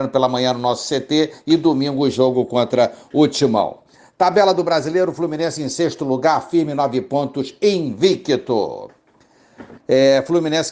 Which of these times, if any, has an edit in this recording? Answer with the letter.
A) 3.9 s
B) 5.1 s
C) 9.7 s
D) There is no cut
C